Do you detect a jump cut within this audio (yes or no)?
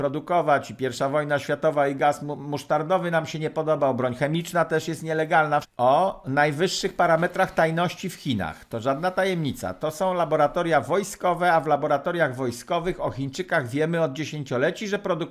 yes